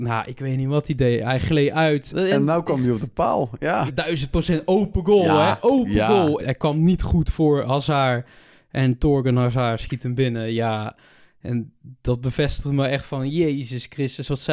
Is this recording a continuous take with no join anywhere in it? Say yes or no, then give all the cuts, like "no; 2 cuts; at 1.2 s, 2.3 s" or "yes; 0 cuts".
no; 3 cuts; at 2.1 s, 3.9 s, 6.4 s